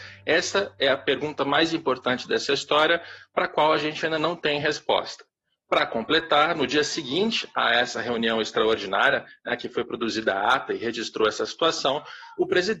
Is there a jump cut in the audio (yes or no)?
no